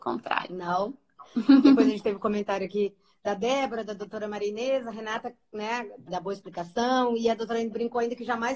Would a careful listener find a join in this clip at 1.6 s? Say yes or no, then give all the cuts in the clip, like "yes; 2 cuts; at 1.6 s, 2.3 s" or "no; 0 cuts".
no; 1 cut; at 6.1 s